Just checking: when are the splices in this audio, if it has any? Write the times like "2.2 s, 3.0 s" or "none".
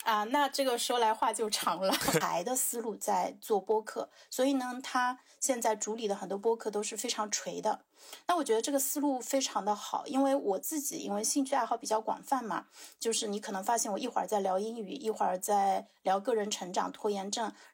2.2 s